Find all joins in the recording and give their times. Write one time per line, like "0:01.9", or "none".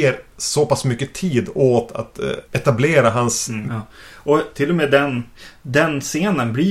0:02.4
0:03.7